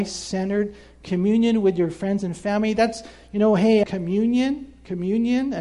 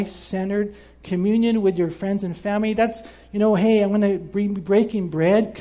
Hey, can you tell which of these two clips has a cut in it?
first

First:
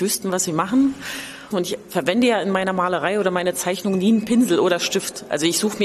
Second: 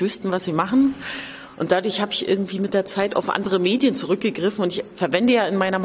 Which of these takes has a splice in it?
first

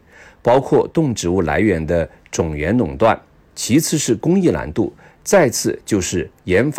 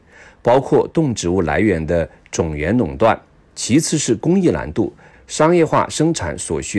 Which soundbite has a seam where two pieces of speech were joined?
second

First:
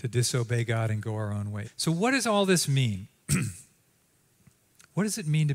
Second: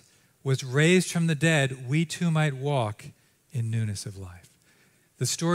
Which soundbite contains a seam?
first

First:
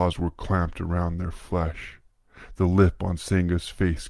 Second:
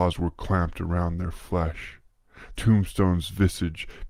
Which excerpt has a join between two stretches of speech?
second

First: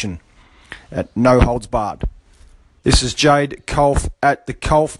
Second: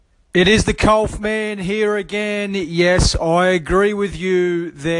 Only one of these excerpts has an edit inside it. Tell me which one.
first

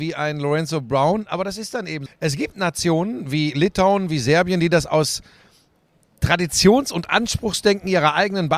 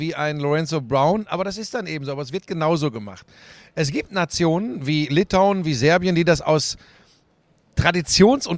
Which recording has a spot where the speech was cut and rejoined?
first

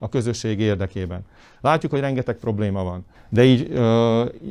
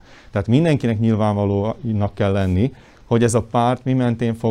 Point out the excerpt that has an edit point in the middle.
first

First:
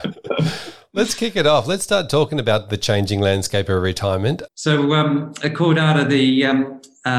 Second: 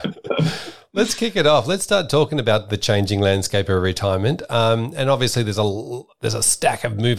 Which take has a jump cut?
first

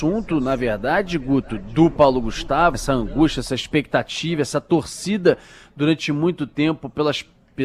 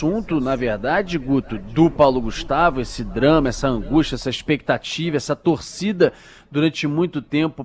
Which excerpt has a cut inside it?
first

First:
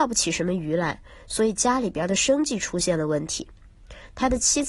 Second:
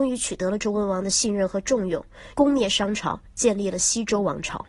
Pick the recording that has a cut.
second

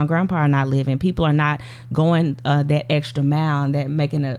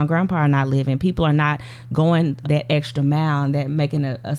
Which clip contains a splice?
second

